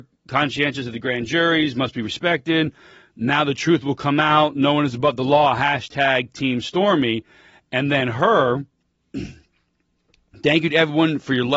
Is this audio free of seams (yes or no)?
yes